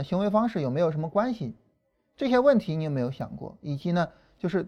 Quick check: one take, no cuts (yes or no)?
yes